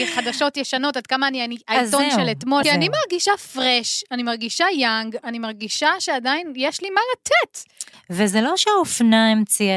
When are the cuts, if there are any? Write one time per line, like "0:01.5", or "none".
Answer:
0:02.6
0:07.9